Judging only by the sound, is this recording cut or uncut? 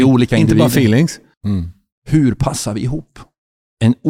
cut